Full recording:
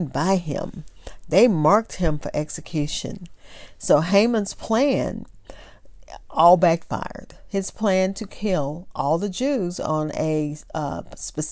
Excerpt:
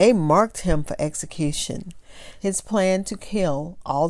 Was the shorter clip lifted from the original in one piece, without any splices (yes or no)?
no